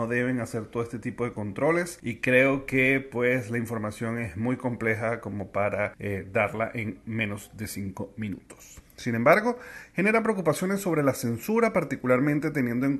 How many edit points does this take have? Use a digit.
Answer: 1